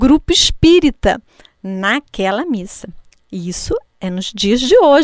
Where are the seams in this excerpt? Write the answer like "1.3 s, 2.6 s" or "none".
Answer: 3.1 s